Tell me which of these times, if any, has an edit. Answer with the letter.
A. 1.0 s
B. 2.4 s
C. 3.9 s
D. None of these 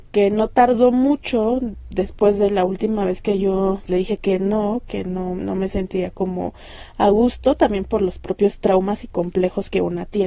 C